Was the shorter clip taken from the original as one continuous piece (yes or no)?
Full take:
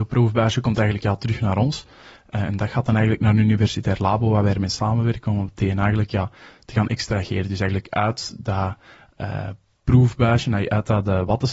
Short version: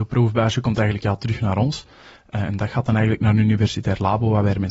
yes